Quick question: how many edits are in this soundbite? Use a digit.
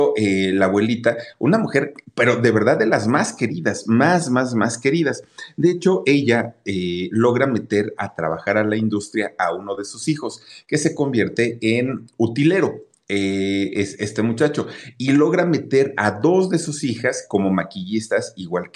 0